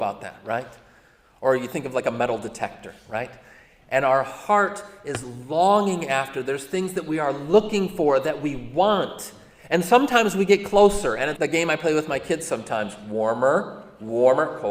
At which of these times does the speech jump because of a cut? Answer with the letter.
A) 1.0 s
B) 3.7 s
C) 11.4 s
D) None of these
C